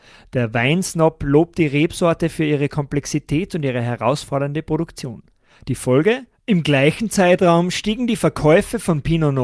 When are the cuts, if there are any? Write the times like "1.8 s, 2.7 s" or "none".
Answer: 6.3 s